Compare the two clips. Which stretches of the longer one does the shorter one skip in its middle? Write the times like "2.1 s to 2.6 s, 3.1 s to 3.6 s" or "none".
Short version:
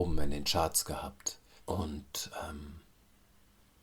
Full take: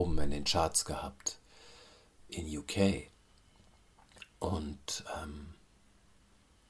1.6 s to 4.3 s